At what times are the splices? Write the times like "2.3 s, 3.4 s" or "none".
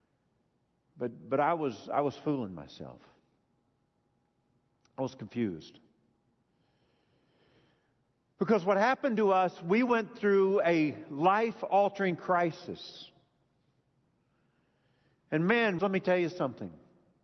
15.8 s